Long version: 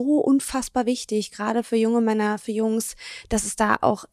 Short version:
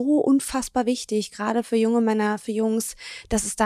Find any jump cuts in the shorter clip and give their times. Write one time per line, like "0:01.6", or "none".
none